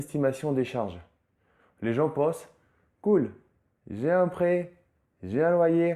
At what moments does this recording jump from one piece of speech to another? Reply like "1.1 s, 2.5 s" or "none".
none